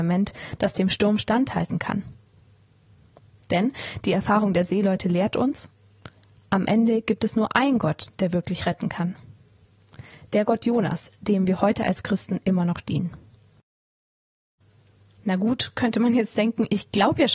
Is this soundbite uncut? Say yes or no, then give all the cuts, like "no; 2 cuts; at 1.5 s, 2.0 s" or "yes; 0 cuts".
yes; 0 cuts